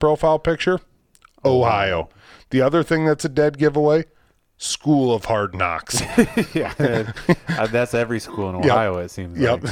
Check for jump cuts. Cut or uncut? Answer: uncut